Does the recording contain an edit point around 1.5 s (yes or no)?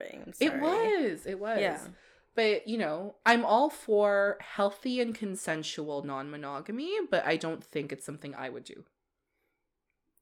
no